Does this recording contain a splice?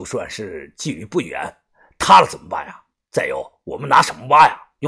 no; 0 cuts

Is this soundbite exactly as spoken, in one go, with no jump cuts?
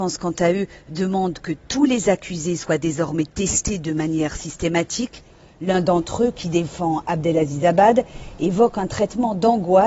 yes; 0 cuts

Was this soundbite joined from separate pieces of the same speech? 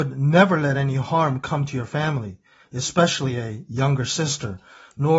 no; 0 cuts

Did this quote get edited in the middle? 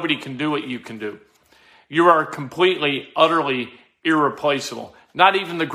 no; 0 cuts

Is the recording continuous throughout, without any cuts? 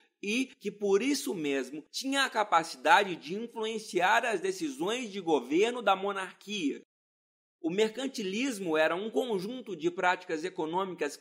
no; 1 cut; at 7.5 s

